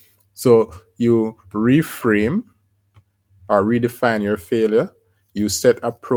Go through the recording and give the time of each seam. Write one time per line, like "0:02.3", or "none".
none